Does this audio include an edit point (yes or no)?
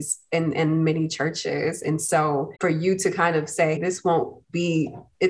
yes